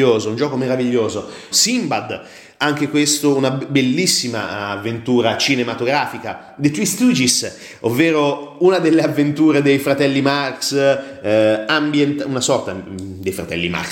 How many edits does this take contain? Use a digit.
1